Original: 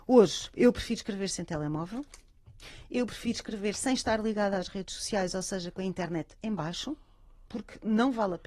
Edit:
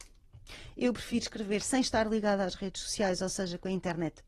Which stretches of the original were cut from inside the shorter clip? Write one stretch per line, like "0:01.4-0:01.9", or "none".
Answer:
none